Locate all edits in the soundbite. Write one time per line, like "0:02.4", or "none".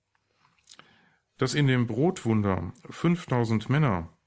none